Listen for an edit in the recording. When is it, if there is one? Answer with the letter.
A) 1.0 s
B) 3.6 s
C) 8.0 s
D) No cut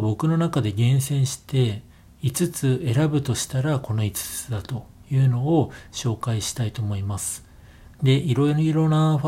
C